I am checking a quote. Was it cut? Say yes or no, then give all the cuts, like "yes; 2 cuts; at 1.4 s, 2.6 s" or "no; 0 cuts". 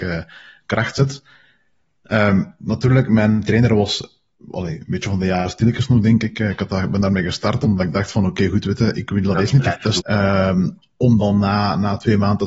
yes; 1 cut; at 10.0 s